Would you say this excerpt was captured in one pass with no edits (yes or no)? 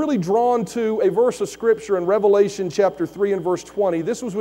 yes